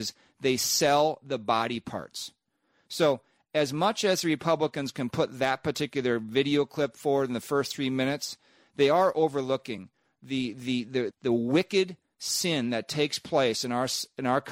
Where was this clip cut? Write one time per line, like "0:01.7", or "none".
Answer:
0:11.1